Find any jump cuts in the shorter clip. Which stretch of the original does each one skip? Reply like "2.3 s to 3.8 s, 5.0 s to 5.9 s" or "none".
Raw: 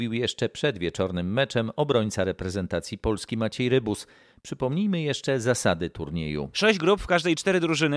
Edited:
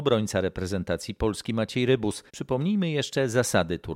4.1 s to 4.4 s

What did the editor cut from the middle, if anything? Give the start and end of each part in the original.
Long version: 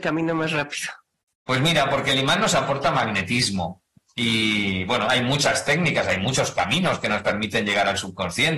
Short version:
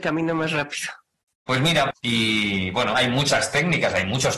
1.9 s to 4.0 s

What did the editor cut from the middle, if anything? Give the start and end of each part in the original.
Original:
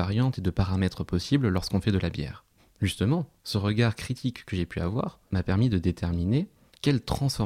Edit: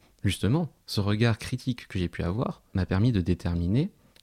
none

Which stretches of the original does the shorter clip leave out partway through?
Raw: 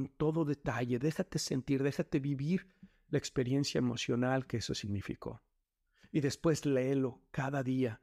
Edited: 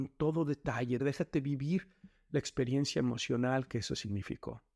1.0 s to 1.8 s

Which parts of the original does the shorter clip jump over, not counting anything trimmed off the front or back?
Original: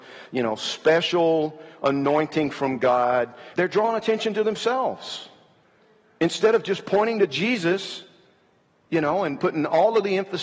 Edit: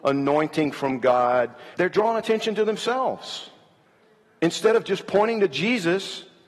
none

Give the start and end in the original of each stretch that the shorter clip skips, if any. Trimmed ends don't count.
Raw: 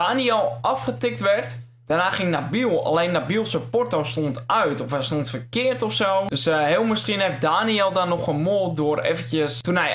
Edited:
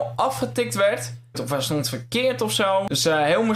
1.8 s to 4.8 s

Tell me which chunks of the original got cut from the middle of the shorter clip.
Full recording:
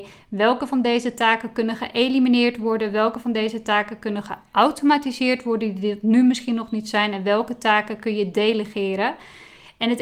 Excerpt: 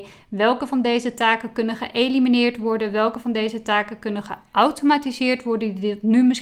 none

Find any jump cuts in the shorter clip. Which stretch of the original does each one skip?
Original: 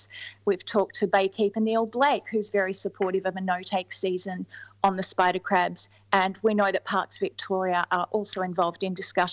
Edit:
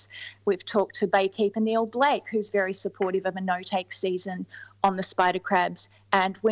none

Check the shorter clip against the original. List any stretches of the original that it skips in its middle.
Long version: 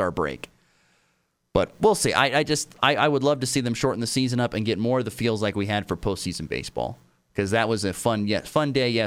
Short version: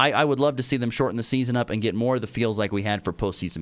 none

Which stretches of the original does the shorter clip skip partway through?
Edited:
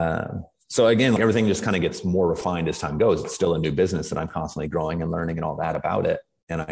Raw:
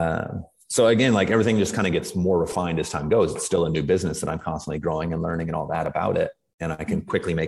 1.2 s to 1.3 s

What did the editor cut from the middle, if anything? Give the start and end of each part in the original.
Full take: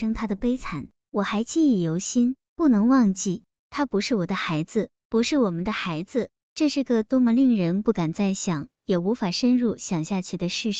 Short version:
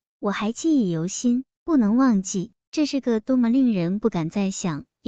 3.5 s to 6.4 s

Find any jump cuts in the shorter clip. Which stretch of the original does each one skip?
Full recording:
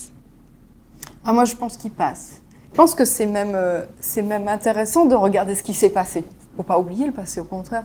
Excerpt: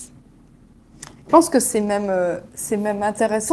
1.1 s to 2.6 s

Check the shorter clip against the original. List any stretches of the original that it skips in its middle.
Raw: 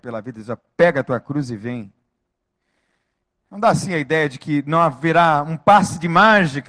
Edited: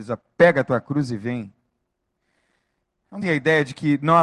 3.6 s to 3.9 s

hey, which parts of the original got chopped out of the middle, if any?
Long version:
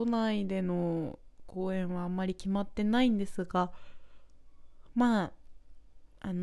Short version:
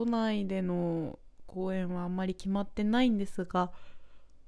none

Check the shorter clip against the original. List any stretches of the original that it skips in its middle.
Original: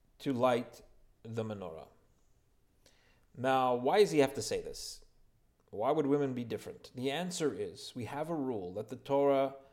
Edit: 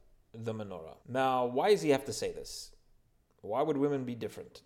1.9 s to 3.3 s

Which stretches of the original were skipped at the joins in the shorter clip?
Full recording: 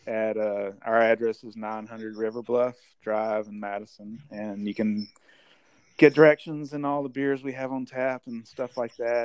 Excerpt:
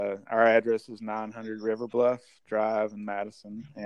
none

